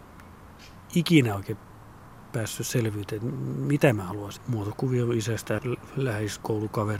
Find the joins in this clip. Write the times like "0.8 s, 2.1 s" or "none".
4.4 s, 5.6 s